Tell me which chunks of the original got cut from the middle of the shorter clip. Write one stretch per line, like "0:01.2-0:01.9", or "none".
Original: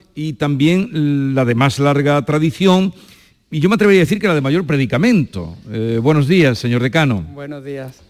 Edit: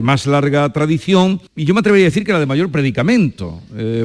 0:03.0-0:03.4